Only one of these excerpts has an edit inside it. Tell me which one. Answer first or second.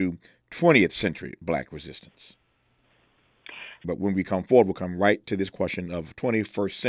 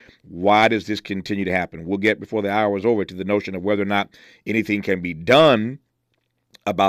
first